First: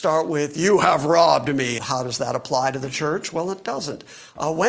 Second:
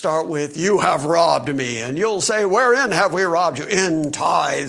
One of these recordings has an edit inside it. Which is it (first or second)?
first